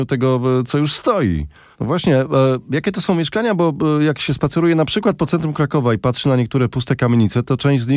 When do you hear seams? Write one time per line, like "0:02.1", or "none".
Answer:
0:01.7